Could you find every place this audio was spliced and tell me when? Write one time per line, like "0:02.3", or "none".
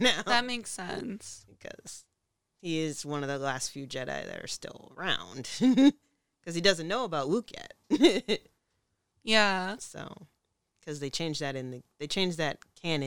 none